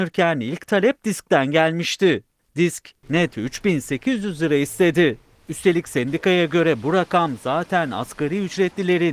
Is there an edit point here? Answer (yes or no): no